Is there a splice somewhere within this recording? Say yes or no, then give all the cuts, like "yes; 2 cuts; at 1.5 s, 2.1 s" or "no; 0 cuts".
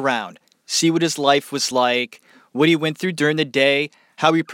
no; 0 cuts